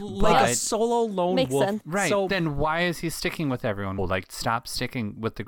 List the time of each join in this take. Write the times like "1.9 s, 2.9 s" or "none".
1.8 s, 4.0 s